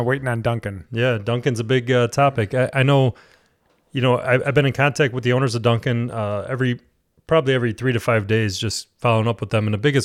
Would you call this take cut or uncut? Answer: uncut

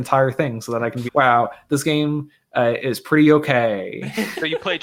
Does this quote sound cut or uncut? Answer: cut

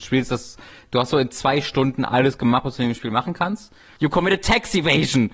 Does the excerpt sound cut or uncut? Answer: cut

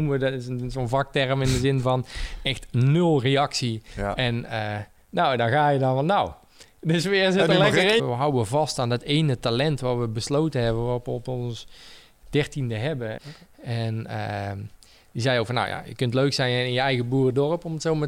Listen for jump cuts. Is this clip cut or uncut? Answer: cut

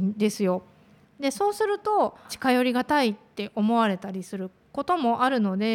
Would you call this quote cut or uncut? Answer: cut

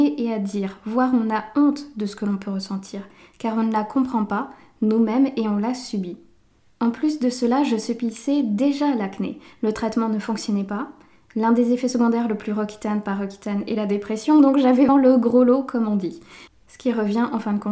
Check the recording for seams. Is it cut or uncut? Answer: cut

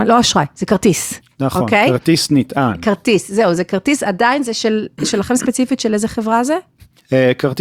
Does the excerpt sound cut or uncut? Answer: uncut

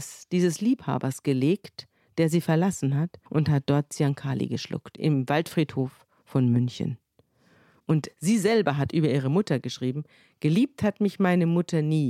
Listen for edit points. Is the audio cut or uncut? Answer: cut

